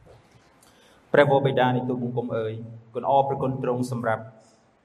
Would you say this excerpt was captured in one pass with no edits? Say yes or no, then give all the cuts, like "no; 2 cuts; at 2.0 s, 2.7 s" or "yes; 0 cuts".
yes; 0 cuts